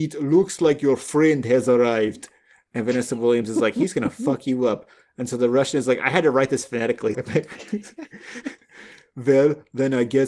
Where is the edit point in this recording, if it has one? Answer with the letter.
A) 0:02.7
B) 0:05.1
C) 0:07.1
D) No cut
C